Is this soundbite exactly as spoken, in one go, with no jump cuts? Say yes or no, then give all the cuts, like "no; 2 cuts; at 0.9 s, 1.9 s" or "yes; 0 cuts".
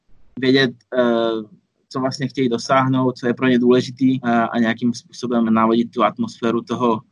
no; 2 cuts; at 4.2 s, 5.5 s